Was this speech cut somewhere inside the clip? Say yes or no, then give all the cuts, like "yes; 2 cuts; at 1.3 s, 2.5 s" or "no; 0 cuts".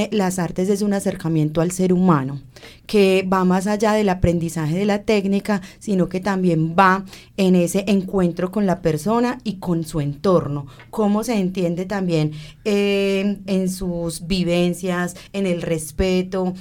yes; 2 cuts; at 13.5 s, 15.3 s